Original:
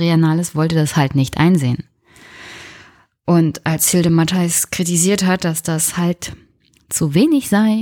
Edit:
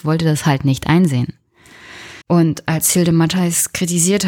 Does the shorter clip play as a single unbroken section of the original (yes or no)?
no